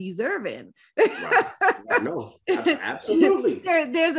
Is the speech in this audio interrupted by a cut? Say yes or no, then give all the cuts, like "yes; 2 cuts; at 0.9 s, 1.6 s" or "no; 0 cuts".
no; 0 cuts